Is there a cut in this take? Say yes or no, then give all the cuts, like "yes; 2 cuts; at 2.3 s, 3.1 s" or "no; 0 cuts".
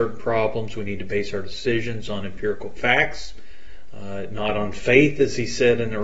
no; 0 cuts